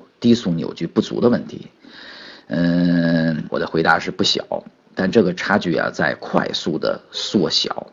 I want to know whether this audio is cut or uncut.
cut